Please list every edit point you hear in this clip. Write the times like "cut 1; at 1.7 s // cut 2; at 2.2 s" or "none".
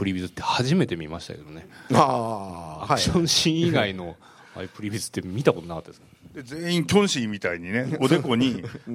none

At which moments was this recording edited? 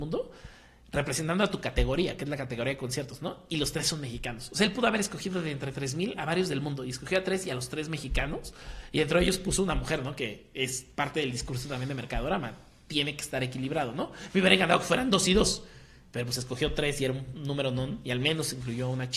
none

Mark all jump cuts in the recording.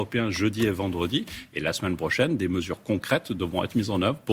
none

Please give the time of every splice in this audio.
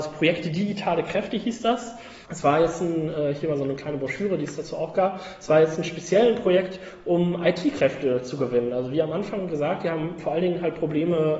cut 1; at 2.2 s

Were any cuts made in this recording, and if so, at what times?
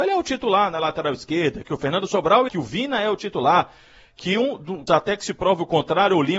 cut 1; at 2.5 s // cut 2; at 4.9 s

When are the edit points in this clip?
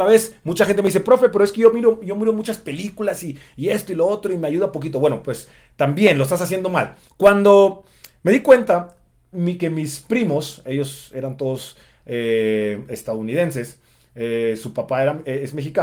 cut 1; at 7.1 s

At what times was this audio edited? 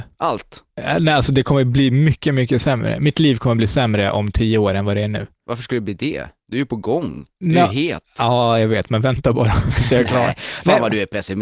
none

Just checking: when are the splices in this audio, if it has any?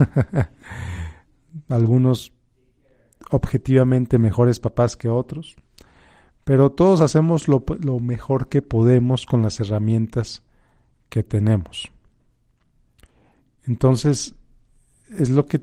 none

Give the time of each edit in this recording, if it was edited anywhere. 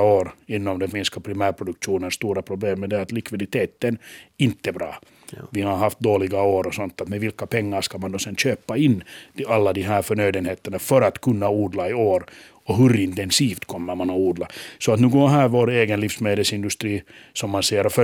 none

